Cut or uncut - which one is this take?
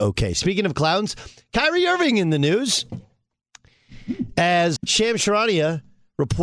cut